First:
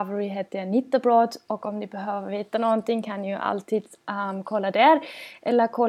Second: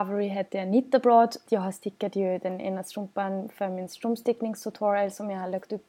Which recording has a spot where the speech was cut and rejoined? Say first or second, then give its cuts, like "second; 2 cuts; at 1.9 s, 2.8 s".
second; 1 cut; at 1.5 s